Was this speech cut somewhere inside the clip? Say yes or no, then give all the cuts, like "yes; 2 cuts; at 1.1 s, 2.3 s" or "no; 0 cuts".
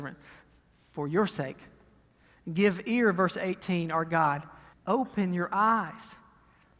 yes; 1 cut; at 4.7 s